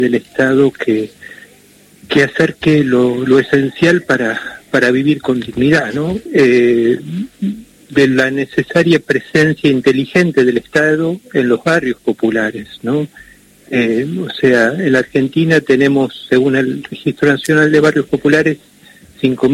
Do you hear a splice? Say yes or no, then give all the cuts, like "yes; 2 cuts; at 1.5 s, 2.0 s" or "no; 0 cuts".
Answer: yes; 1 cut; at 6.3 s